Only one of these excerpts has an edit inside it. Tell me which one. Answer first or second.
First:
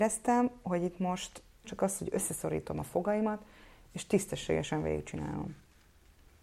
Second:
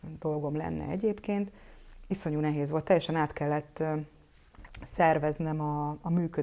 first